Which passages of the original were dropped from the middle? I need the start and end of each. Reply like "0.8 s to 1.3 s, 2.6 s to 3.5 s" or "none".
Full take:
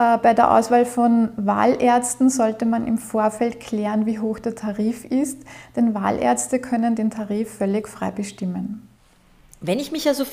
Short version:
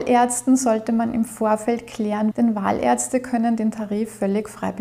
4.0 s to 5.7 s